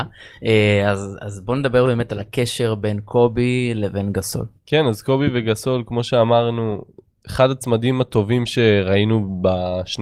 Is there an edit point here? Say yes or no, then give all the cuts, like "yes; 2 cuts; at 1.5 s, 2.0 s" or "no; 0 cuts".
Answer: yes; 1 cut; at 4.6 s